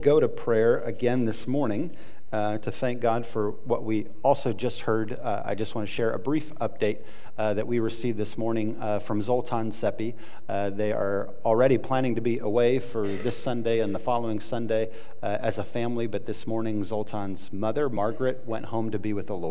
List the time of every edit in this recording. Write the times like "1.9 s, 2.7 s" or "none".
none

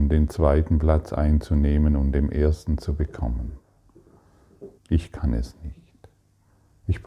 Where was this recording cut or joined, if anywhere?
4.8 s

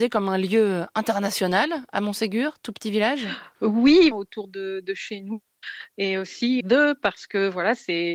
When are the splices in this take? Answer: 4.1 s, 6.6 s

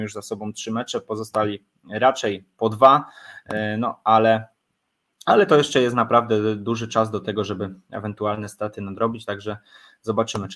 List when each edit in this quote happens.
none

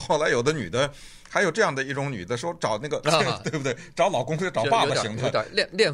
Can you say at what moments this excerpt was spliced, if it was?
3.0 s

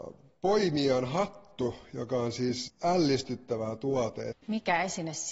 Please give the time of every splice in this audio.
2.7 s, 4.3 s

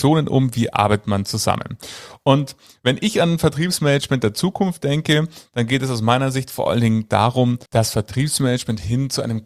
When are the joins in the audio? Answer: 7.6 s

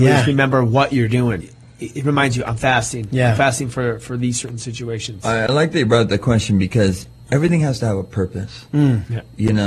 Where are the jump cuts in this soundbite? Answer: 1.4 s

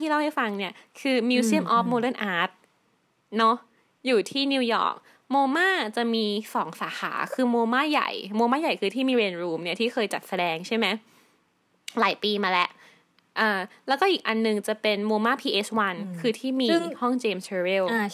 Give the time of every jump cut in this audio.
none

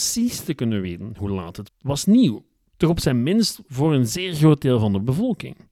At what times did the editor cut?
1.7 s

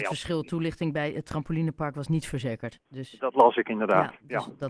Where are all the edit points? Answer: 2.9 s

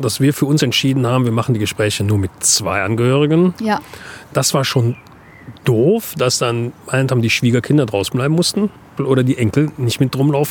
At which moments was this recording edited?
6.8 s, 9.0 s

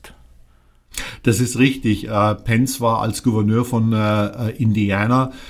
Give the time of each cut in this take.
none

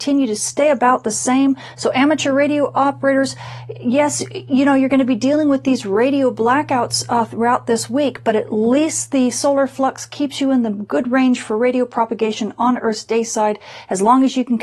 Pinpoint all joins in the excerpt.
none

